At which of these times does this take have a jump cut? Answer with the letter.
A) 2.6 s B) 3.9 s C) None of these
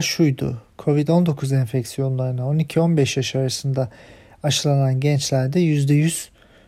C